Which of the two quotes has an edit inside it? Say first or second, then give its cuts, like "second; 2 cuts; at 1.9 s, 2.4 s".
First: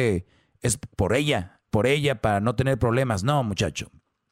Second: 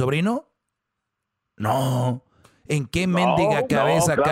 first; 1 cut; at 1.7 s